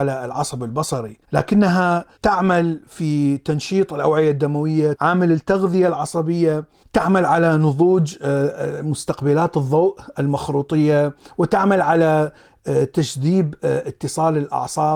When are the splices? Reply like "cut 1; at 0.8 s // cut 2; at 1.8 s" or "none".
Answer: cut 1; at 4.9 s